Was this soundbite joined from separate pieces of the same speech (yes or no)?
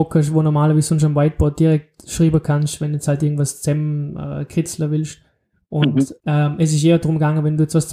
yes